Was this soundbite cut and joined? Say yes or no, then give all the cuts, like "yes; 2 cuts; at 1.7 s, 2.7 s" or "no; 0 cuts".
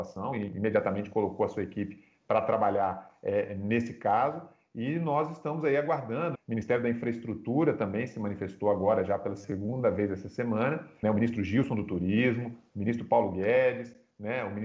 yes; 3 cuts; at 6.4 s, 11.0 s, 12.7 s